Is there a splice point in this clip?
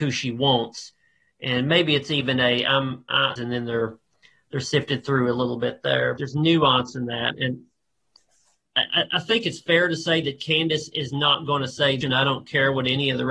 yes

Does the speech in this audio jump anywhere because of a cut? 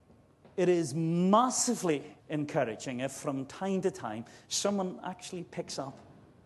yes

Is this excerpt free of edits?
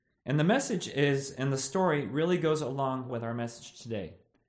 no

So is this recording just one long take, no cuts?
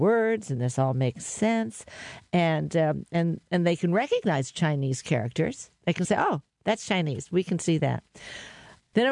yes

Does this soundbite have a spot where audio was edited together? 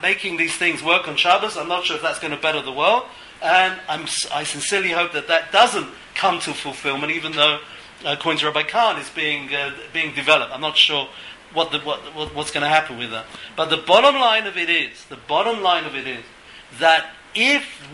no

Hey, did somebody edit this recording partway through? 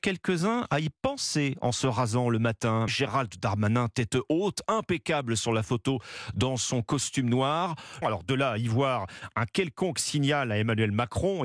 yes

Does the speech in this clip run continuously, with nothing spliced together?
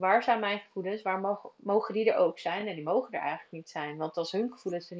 yes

